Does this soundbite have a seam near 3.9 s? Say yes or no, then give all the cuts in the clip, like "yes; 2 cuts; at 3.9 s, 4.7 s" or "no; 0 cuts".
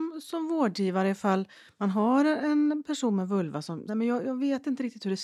yes; 1 cut; at 3.9 s